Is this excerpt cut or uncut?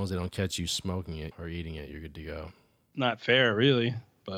cut